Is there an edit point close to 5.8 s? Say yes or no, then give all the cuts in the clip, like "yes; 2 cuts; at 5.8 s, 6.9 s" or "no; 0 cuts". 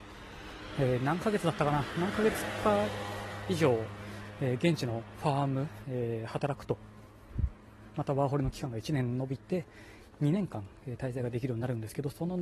yes; 1 cut; at 5.8 s